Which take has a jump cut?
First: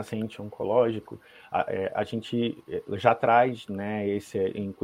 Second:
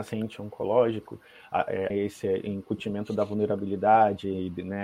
second; 1 cut; at 1.9 s

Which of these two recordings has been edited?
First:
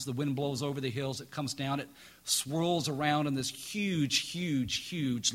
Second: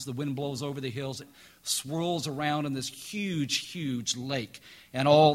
second; 2 cuts; at 1.2 s, 3.6 s

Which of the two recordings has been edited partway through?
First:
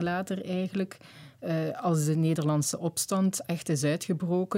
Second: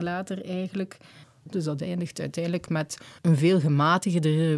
second; 2 cuts; at 1.2 s, 3.2 s

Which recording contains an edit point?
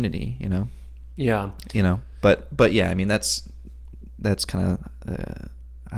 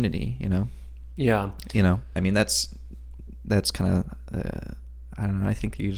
second; 1 cut; at 2.2 s

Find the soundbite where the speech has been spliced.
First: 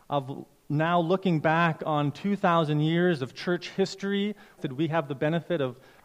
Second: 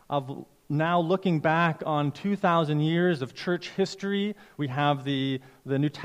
first; 1 cut; at 4.6 s

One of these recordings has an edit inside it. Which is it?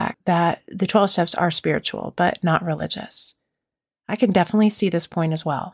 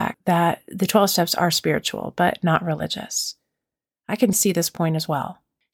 second; 1 cut; at 4.3 s

